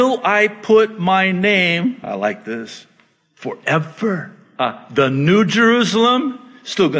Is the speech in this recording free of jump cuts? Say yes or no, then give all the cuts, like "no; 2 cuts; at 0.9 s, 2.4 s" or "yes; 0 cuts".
yes; 0 cuts